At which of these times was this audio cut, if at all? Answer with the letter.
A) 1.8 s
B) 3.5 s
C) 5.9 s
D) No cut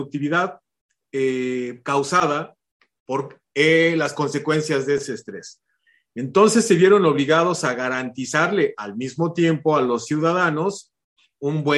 D